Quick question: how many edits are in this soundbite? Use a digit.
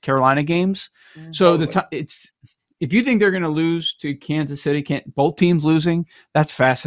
0